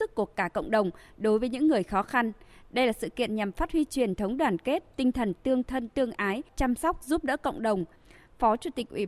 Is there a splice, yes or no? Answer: yes